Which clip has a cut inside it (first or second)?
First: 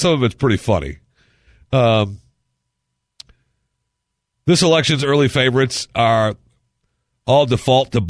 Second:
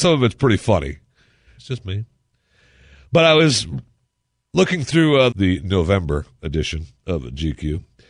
second